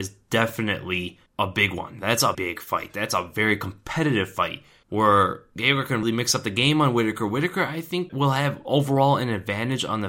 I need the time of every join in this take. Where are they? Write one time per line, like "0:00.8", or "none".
0:02.3
0:06.0